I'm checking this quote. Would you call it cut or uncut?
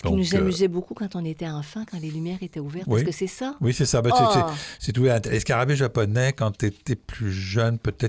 uncut